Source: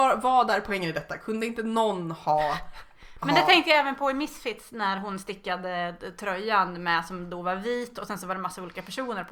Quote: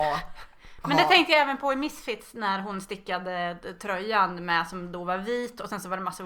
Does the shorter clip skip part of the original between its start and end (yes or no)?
no